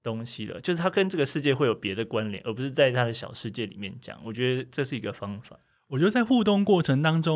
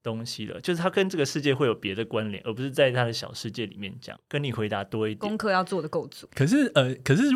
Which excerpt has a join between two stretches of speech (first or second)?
second